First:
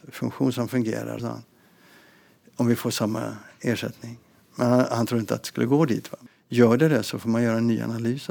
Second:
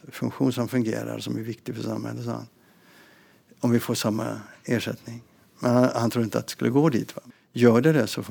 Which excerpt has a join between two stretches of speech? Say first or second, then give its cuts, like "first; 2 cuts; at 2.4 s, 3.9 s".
first; 1 cut; at 1.2 s